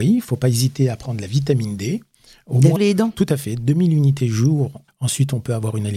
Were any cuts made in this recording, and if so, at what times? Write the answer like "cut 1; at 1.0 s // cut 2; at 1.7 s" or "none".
cut 1; at 2.8 s // cut 2; at 4.9 s